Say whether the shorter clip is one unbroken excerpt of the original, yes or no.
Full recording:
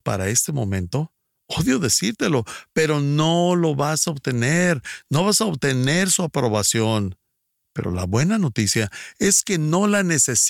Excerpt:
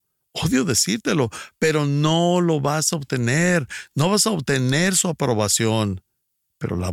yes